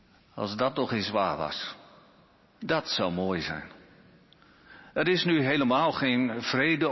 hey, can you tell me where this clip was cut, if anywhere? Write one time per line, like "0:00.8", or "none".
none